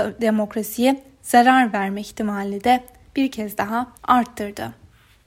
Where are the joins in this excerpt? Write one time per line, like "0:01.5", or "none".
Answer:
0:03.9